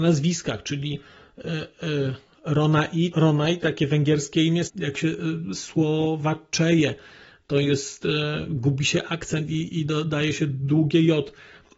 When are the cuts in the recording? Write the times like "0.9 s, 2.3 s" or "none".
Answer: 3.1 s, 4.7 s